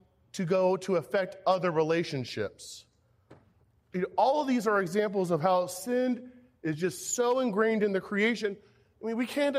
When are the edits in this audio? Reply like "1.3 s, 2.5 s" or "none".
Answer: none